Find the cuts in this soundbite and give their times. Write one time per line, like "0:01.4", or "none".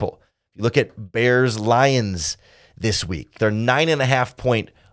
0:03.4